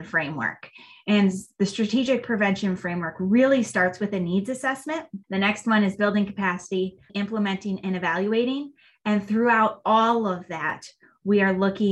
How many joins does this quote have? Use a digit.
2